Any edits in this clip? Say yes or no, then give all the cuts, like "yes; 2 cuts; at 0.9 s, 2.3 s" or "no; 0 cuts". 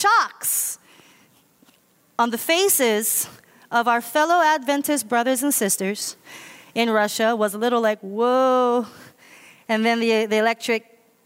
no; 0 cuts